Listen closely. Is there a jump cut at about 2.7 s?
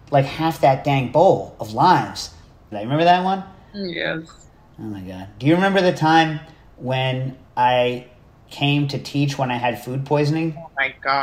yes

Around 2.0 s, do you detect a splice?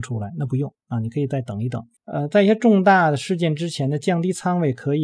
yes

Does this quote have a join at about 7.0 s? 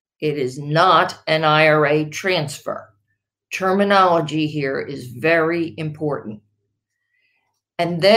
no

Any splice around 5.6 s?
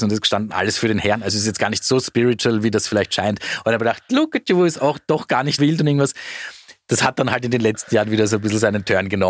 yes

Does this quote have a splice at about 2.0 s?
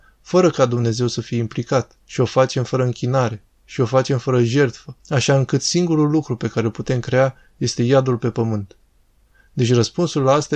yes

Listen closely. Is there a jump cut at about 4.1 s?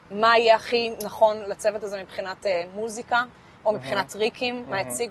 no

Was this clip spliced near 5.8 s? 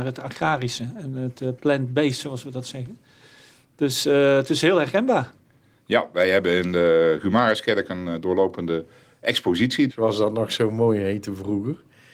no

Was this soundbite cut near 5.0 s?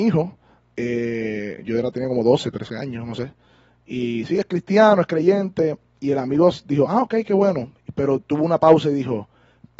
no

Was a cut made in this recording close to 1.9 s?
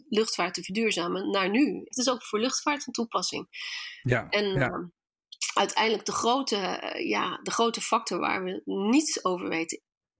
yes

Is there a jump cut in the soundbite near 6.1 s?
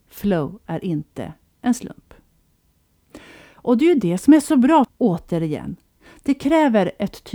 no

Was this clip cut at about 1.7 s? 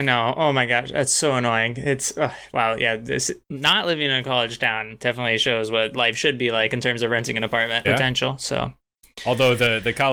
no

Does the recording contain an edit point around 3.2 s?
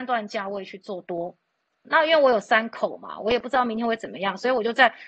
no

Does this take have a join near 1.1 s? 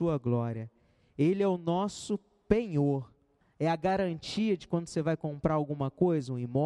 no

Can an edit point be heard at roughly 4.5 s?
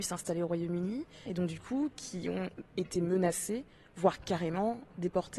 no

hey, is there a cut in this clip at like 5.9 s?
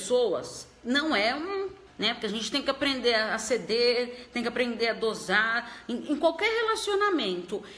no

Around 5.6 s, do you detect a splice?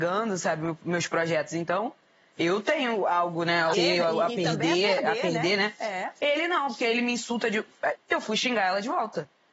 no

